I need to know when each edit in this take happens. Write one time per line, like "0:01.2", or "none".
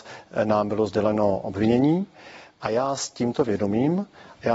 0:02.5